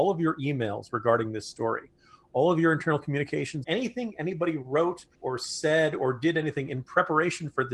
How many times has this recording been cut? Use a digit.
2